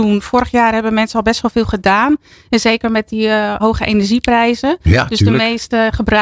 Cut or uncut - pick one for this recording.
cut